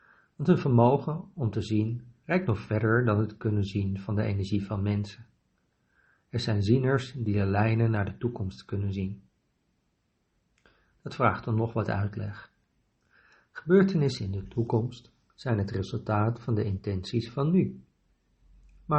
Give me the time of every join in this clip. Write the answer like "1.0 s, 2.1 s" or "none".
none